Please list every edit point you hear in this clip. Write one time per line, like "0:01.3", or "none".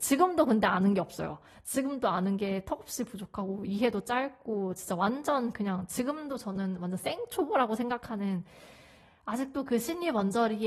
none